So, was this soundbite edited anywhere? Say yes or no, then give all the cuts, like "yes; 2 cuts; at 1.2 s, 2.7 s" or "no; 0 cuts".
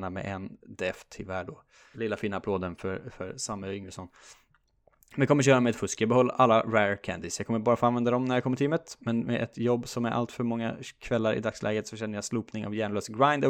yes; 1 cut; at 1.9 s